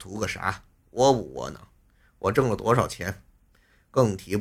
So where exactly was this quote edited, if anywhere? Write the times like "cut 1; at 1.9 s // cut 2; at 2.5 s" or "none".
none